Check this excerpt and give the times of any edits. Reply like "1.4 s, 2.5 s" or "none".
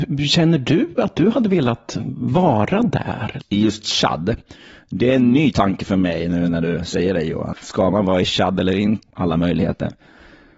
3.4 s, 7.5 s, 9.1 s